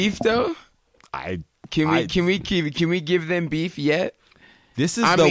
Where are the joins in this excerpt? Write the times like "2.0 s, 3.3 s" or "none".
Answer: none